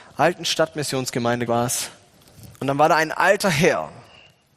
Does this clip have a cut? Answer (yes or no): yes